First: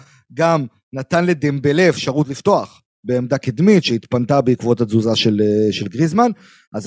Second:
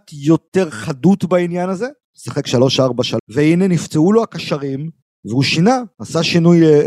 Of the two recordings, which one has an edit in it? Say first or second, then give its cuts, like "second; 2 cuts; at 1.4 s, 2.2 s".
second; 2 cuts; at 2.0 s, 3.2 s